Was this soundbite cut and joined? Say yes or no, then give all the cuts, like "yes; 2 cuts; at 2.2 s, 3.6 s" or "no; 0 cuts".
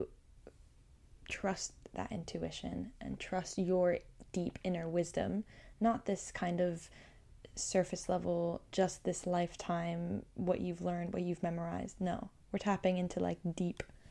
no; 0 cuts